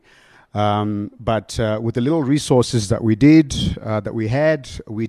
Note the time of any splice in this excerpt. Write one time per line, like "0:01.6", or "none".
none